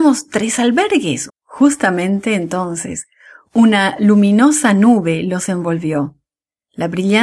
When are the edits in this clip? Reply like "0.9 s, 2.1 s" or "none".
1.3 s